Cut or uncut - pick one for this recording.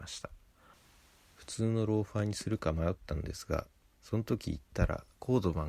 cut